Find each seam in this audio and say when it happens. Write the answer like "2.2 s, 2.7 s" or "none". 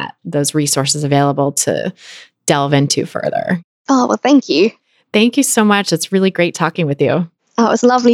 none